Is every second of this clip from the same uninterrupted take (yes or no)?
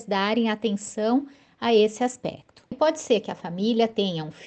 no